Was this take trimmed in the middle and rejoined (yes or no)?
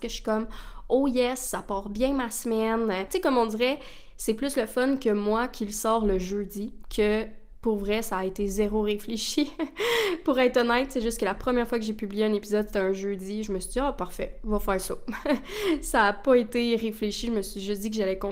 yes